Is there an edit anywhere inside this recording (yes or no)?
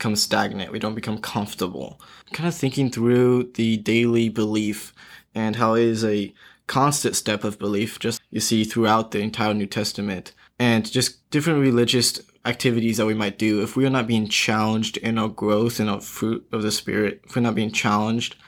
yes